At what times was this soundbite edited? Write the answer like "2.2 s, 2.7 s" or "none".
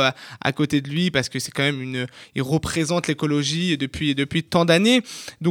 none